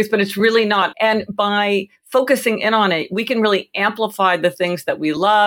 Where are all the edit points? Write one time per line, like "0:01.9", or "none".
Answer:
0:00.9